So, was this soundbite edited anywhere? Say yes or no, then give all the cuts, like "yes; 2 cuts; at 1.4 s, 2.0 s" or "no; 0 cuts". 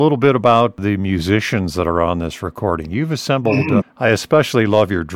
yes; 1 cut; at 3.8 s